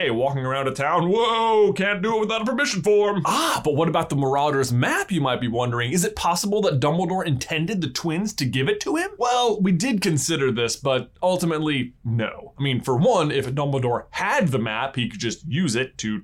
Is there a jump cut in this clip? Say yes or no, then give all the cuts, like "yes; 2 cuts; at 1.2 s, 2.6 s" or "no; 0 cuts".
no; 0 cuts